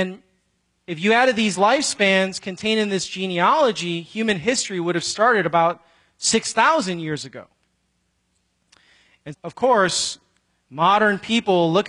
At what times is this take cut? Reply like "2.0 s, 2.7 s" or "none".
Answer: 9.3 s